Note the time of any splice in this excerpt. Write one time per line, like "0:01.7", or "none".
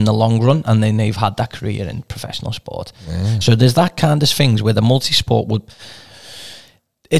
none